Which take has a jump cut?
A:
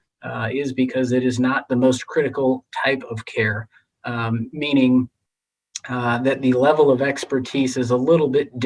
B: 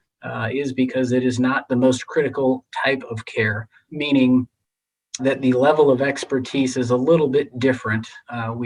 B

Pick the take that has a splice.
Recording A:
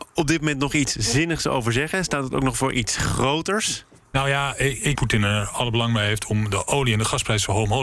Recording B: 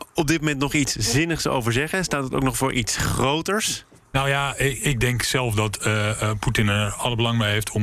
A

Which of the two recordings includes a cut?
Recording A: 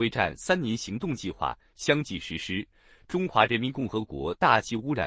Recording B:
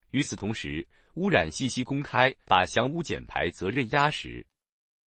B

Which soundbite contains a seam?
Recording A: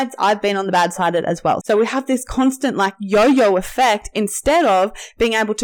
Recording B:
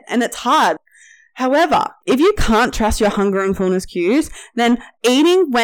A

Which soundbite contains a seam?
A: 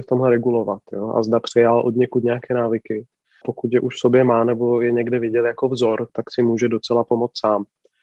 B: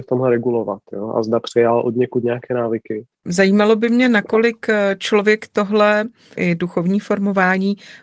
B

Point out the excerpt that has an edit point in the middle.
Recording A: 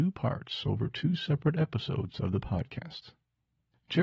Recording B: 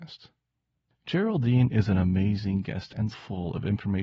B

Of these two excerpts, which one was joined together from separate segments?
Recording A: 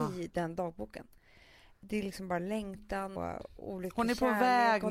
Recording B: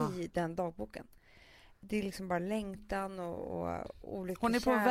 A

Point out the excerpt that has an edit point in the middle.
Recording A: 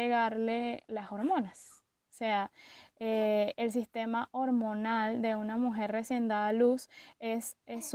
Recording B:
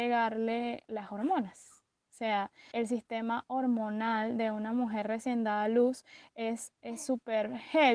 B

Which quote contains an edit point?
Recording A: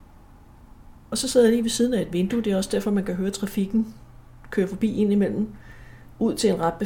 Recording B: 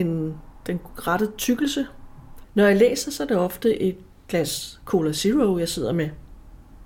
B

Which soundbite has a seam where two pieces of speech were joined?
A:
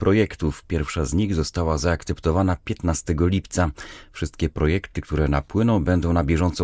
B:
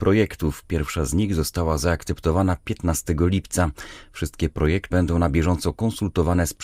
B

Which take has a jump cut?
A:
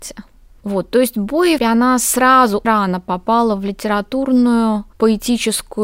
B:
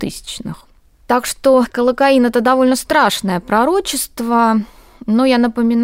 A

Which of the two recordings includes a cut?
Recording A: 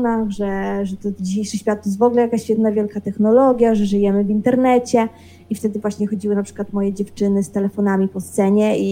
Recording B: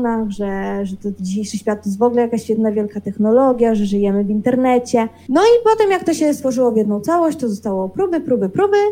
B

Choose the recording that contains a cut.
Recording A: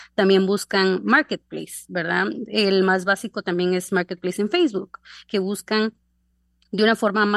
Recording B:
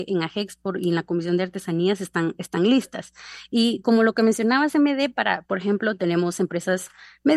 B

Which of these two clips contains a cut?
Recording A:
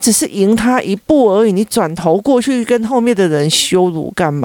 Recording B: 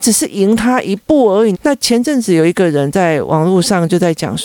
B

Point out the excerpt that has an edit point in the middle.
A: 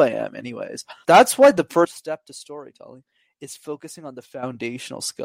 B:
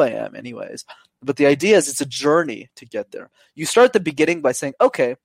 A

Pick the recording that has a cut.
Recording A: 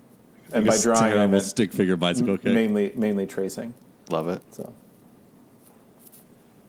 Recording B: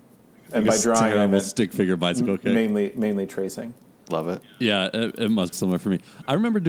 B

